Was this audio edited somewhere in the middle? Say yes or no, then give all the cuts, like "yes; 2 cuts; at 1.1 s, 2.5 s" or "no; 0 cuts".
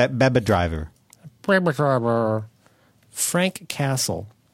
no; 0 cuts